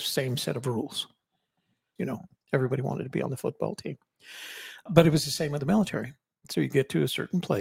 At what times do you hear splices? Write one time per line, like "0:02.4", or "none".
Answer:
0:02.0
0:04.9